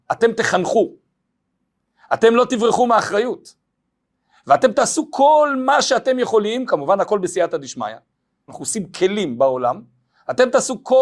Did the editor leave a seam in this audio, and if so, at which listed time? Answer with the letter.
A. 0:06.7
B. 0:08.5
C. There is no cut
B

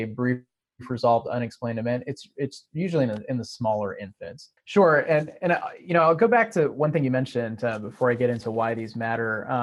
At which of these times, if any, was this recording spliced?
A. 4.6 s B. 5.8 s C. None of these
A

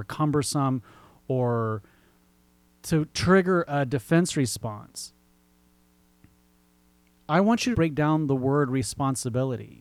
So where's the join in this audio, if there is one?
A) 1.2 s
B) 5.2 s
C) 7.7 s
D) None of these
C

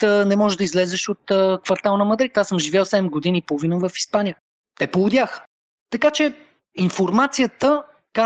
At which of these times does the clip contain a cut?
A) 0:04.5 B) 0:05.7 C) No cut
C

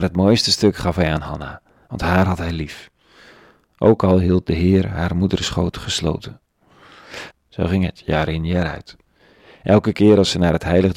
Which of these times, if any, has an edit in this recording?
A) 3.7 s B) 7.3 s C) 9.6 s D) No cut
B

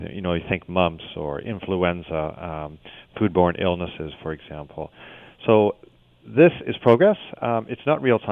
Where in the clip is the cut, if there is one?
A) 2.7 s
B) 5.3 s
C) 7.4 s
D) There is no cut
D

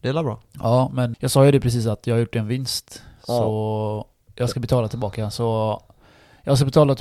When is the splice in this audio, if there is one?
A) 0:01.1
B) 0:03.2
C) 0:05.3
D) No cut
A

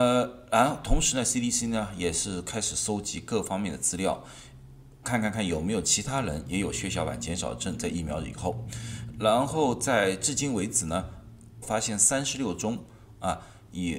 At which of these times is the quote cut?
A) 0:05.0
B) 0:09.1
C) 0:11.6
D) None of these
C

